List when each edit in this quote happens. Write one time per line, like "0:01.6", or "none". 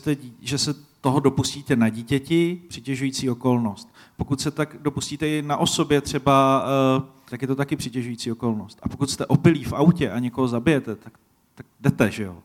0:07.3